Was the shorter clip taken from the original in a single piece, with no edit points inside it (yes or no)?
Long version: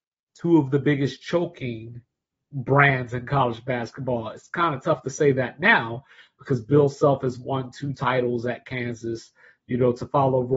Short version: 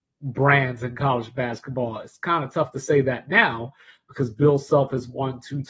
yes